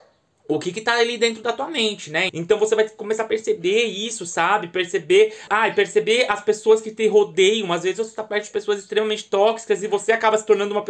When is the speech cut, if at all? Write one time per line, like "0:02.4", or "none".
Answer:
0:02.3
0:05.5